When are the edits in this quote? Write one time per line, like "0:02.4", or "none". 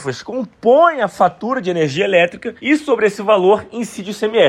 0:02.6